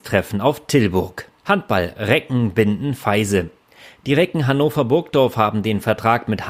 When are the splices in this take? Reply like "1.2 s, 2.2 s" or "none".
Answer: 1.4 s